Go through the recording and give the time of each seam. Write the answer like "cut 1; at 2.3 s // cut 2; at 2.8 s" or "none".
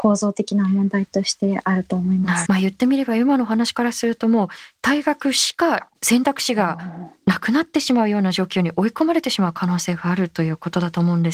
cut 1; at 2.5 s // cut 2; at 6.0 s